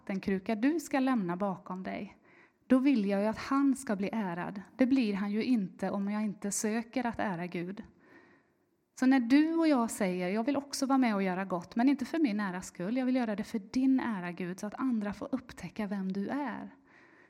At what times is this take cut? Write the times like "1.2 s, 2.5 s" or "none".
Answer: 2.5 s